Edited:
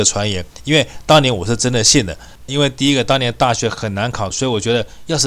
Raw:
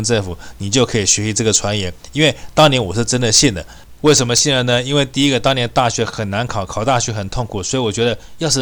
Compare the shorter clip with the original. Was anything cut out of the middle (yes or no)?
yes